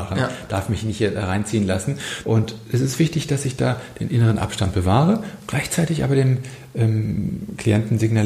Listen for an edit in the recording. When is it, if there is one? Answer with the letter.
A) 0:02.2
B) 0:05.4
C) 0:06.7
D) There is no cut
A